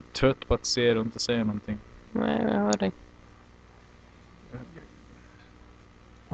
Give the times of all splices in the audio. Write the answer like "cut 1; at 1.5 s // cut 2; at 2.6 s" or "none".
none